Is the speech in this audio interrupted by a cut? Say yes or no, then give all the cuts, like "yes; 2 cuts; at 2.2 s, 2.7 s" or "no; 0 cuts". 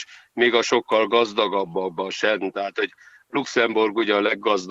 no; 0 cuts